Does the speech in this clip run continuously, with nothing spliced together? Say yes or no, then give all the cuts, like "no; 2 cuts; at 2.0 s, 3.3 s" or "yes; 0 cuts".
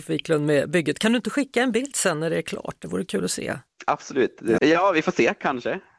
no; 1 cut; at 4.6 s